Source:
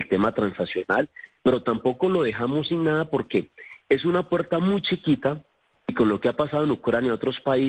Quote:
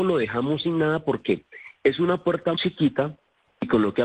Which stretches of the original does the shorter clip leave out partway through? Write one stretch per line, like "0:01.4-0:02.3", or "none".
0:04.6-0:04.8